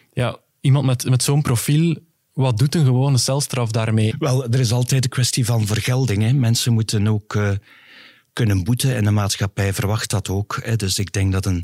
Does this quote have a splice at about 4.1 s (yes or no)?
yes